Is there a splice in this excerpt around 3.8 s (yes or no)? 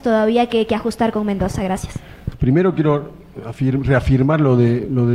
no